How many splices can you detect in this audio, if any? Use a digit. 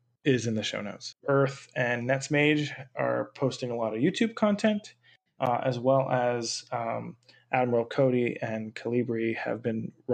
1